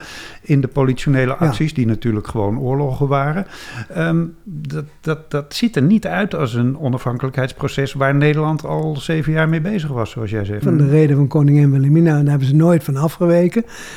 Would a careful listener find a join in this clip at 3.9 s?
no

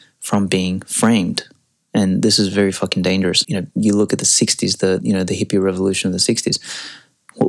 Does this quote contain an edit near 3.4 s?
yes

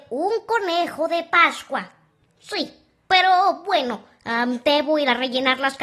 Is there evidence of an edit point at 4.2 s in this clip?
no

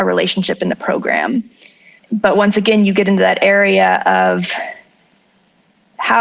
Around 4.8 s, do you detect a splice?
no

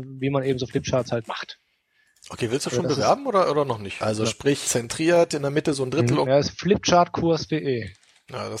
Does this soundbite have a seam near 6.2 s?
yes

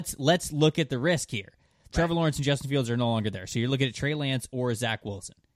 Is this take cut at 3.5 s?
no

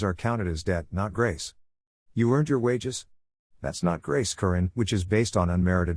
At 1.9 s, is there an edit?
yes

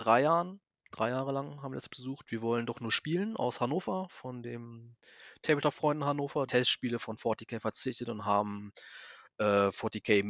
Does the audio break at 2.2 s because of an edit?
no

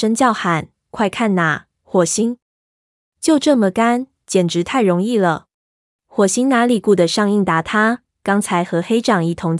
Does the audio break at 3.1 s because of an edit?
no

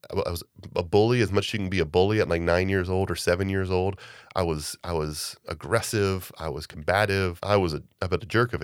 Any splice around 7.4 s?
yes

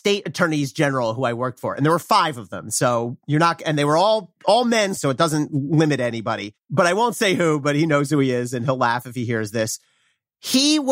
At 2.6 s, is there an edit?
no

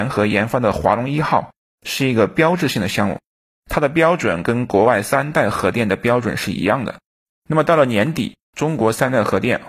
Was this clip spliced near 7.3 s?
yes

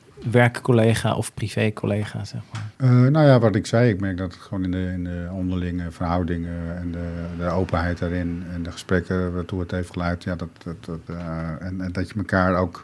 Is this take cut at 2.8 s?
yes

